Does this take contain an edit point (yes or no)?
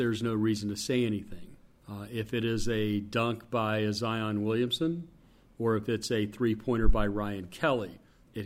no